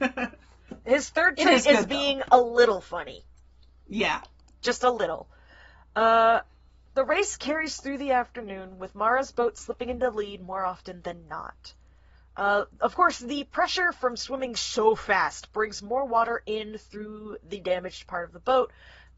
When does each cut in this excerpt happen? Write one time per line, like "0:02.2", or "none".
none